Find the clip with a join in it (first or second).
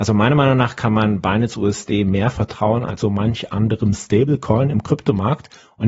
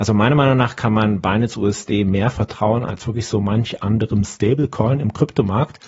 first